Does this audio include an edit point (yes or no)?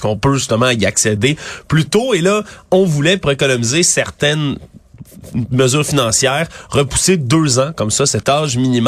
no